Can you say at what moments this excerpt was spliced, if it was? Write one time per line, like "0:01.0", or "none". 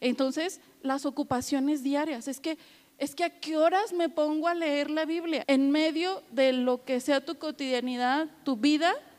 0:05.4